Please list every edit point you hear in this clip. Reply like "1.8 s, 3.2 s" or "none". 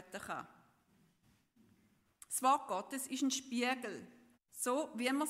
4.3 s